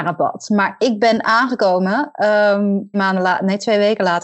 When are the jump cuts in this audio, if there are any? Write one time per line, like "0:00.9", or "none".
0:02.9